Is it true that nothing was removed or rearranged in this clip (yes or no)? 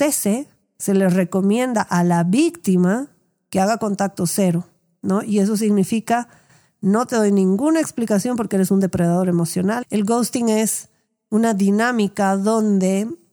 no